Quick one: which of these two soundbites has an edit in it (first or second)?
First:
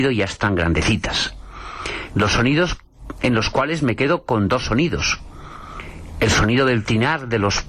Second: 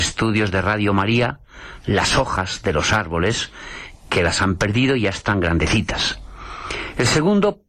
first